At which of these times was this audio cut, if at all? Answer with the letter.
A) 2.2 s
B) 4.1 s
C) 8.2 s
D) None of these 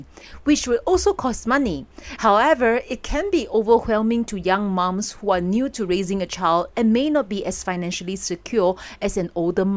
A